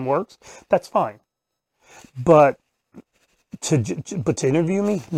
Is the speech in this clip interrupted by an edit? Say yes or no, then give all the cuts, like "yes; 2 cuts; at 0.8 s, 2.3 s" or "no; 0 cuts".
no; 0 cuts